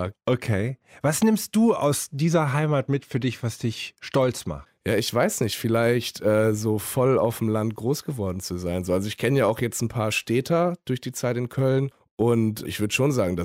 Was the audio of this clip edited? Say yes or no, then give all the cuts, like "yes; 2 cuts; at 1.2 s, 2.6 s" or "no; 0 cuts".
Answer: no; 0 cuts